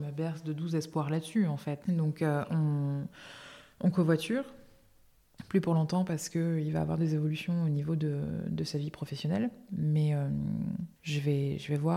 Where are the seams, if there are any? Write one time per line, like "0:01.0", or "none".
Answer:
0:01.8